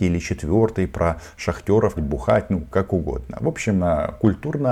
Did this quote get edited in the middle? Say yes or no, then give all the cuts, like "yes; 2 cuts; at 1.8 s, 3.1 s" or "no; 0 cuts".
yes; 1 cut; at 2.0 s